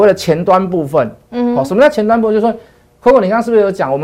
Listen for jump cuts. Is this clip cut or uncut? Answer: uncut